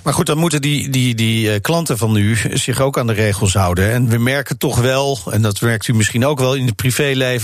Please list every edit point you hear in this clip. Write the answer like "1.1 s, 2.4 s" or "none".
none